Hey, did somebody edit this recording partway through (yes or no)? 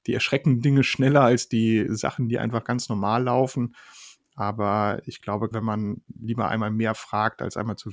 yes